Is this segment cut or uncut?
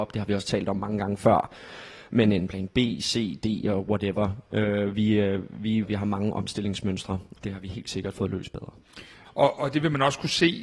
cut